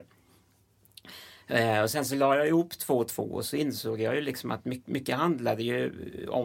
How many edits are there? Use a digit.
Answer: 0